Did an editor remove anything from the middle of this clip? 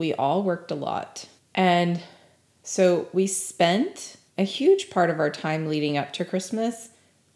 yes; 2 cuts; at 1.4 s, 4.3 s

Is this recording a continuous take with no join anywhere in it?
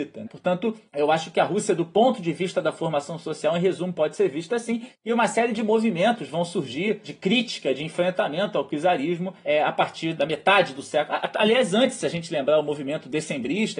yes; 0 cuts

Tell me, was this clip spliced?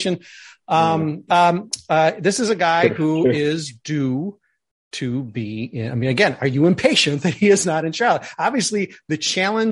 yes; 1 cut; at 1.3 s

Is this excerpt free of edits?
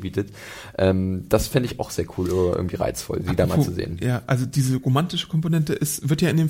yes; 0 cuts

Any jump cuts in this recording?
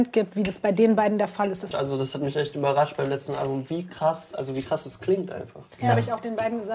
yes; 1 cut; at 1.7 s

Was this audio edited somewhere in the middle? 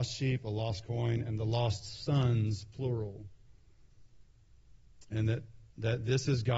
no; 0 cuts

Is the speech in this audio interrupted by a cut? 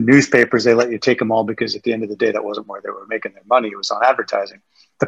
no; 0 cuts

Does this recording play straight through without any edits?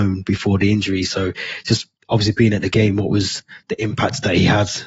yes; 0 cuts

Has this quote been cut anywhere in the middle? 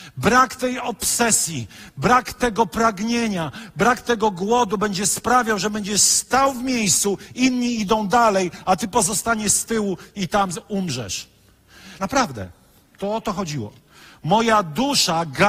yes; 1 cut; at 12.0 s

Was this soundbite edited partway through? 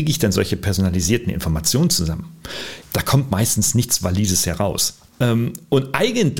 yes; 2 cuts; at 2.8 s, 5.1 s

